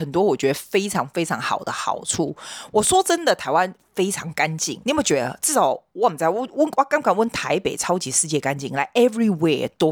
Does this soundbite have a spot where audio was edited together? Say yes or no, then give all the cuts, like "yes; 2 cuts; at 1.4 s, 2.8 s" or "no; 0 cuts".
yes; 1 cut; at 4.8 s